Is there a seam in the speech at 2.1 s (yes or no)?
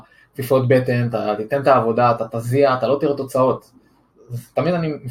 no